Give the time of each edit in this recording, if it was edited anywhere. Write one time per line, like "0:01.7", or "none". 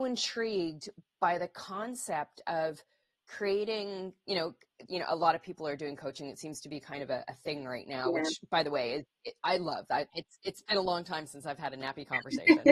0:04.9
0:10.1